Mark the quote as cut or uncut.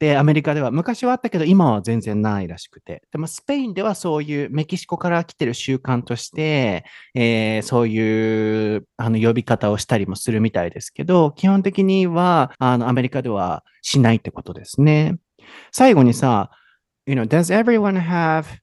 cut